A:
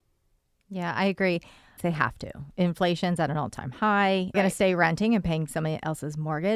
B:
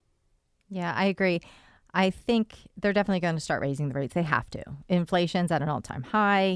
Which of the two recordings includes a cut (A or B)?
A